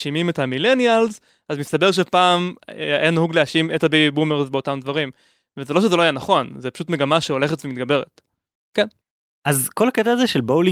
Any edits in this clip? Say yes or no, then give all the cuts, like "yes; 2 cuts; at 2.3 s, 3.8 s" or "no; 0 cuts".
yes; 1 cut; at 8.6 s